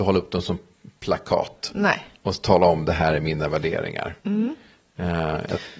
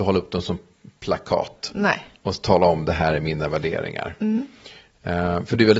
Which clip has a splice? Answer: first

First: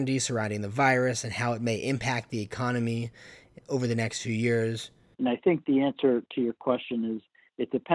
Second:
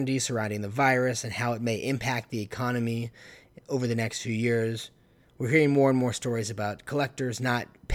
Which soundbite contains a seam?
first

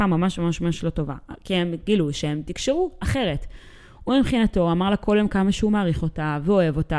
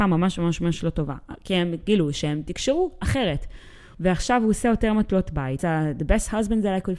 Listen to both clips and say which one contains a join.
second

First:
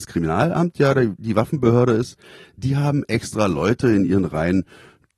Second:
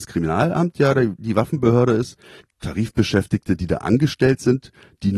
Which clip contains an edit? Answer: second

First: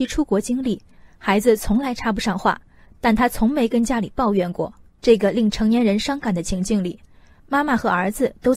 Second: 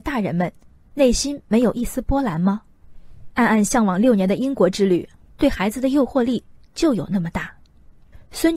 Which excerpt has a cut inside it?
first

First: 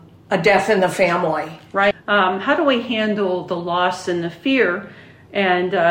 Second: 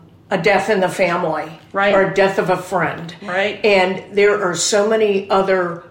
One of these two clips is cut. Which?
first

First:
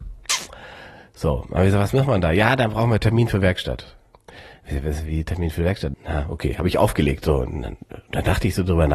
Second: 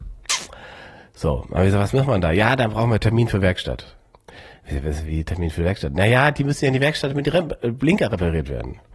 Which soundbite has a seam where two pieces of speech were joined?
first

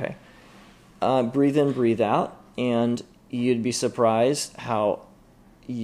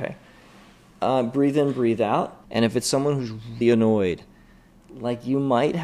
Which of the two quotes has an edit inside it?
second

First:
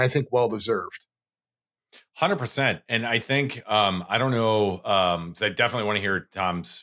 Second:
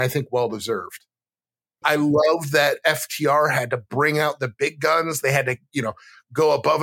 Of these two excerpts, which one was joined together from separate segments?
second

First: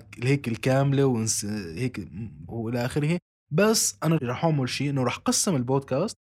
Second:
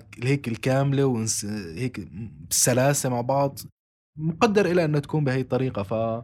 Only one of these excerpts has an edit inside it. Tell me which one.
first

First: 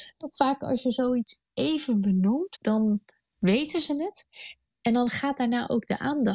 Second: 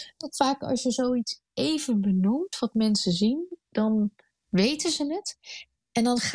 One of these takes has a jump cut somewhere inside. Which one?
first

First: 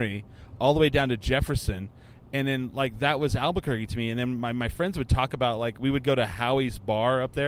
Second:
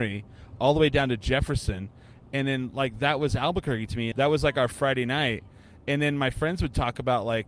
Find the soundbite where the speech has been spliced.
second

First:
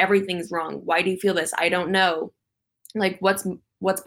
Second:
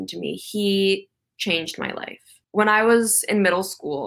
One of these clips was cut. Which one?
second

